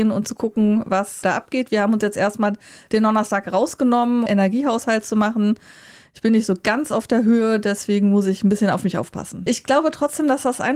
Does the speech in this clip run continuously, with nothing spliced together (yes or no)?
no